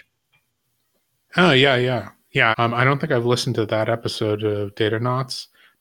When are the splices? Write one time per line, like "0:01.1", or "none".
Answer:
0:02.5